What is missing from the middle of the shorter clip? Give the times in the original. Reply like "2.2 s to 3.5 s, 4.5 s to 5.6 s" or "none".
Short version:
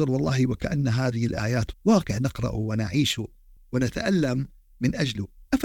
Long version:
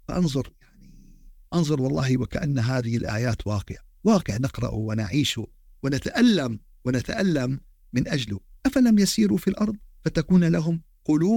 3.4 s to 3.9 s, 5.8 s to 6.7 s